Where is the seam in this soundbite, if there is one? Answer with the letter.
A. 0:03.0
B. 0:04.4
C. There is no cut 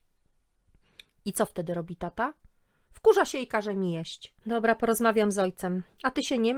B